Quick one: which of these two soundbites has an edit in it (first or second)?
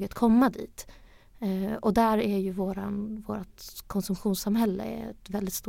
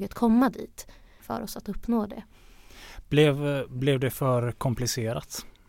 second